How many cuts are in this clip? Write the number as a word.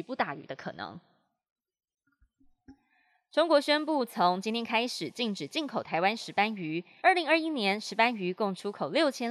one